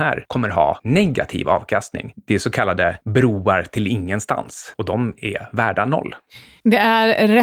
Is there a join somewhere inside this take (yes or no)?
no